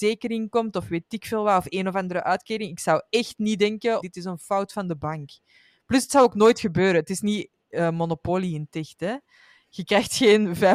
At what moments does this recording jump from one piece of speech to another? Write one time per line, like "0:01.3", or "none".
0:04.0